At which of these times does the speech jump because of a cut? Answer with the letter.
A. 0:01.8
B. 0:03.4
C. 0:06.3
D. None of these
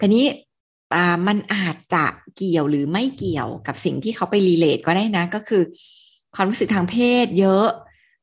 D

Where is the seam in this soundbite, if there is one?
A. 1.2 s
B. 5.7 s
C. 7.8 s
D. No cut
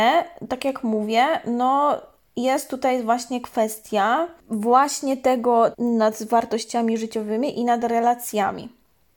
B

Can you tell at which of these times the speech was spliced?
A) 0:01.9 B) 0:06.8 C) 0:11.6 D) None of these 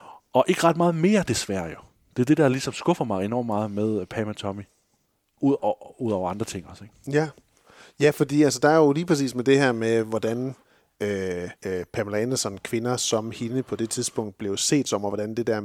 C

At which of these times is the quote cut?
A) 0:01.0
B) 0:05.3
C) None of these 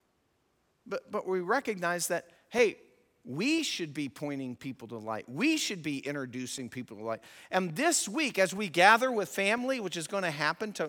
C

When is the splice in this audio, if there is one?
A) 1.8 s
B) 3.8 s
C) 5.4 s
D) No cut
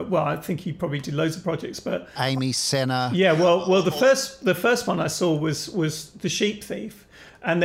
D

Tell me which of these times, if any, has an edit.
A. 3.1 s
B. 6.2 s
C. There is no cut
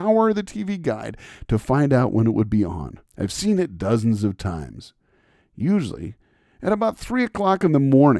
A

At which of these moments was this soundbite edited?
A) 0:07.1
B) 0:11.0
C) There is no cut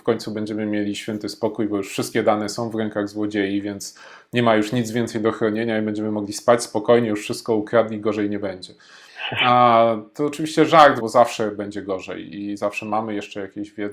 B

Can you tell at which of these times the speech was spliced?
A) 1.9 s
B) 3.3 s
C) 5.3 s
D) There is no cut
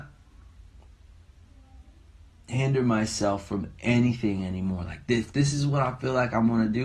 D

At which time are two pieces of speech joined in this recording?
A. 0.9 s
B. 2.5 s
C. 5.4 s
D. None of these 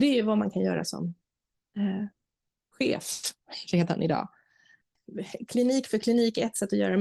D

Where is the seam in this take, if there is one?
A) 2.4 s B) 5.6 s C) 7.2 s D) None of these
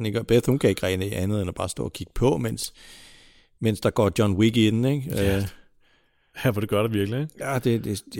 D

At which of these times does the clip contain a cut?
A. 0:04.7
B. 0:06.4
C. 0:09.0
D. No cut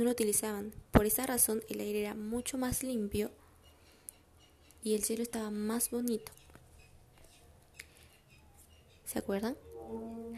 C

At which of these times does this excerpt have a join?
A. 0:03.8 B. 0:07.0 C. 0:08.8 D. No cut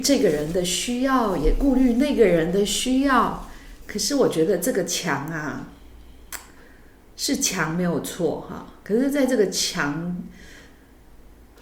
A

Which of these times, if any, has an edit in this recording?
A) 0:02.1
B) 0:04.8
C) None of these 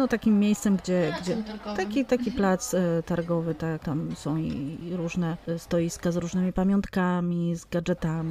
B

